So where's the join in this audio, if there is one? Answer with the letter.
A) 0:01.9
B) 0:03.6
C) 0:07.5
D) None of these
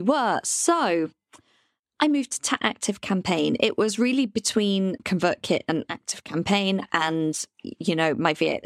C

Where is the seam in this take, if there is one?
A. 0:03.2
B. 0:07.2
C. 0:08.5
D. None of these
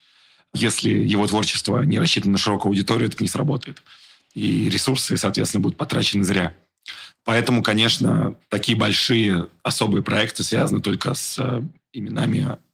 A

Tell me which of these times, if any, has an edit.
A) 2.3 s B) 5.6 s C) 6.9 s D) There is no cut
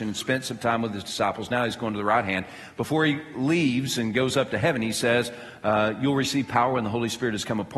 D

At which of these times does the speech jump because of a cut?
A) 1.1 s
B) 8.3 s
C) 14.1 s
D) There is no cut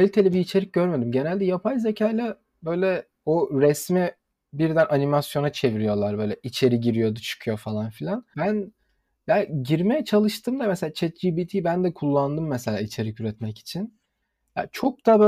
B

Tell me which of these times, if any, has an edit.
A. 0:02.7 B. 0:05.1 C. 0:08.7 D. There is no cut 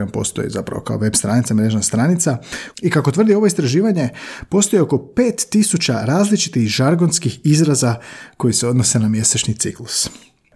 A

